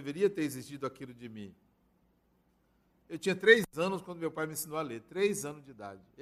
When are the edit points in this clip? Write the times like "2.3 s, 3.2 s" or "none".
2.9 s